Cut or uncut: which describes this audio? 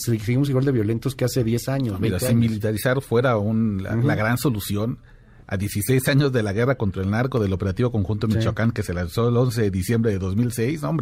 uncut